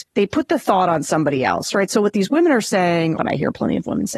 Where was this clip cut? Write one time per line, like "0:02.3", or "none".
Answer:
0:03.2